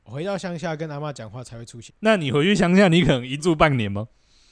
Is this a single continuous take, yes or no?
no